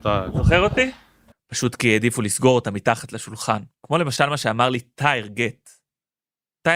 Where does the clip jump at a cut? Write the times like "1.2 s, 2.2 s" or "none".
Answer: 1.3 s, 3.7 s